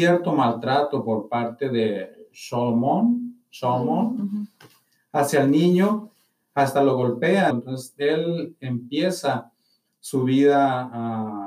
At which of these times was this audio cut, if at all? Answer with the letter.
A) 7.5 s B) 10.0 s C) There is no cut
A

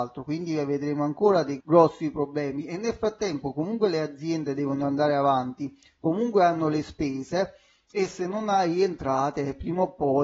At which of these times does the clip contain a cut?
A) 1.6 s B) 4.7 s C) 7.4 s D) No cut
A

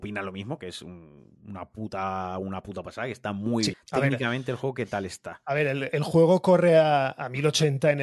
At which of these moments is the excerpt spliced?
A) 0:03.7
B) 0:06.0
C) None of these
A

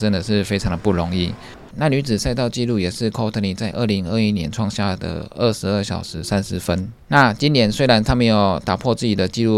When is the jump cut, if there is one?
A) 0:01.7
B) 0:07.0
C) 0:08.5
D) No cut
A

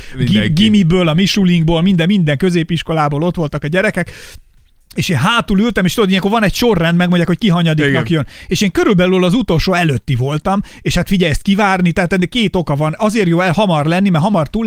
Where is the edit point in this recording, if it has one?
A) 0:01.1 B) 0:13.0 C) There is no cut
C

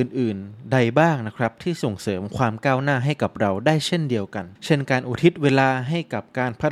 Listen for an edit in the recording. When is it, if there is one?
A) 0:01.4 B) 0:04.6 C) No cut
B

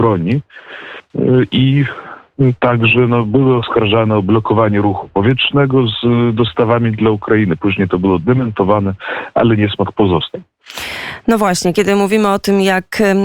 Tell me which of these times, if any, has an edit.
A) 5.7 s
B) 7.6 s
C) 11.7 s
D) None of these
D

